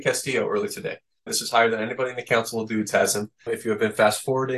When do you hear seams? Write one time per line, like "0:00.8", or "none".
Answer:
0:01.3
0:03.5